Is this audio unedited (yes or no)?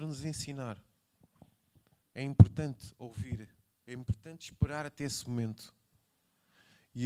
no